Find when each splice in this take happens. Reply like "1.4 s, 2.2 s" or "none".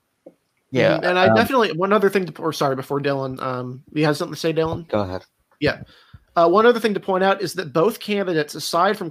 4.9 s